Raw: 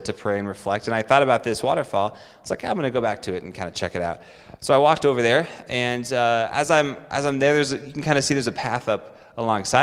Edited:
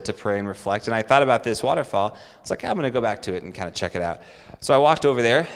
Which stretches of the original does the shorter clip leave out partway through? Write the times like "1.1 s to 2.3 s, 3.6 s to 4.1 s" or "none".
none